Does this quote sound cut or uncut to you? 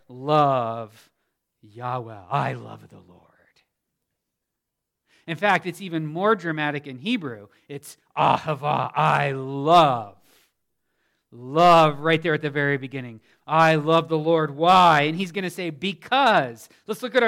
uncut